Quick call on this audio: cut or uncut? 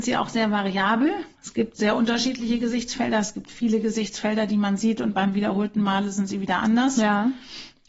cut